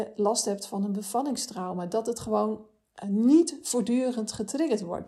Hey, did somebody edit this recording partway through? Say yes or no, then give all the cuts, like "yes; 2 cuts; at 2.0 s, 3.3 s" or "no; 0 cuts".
yes; 1 cut; at 3.0 s